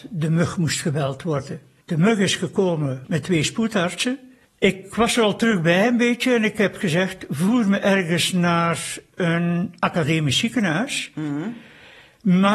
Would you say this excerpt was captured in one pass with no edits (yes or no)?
yes